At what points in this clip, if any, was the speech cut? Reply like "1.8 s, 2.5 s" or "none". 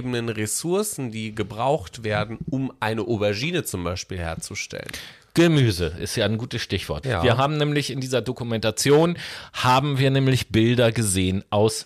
7.0 s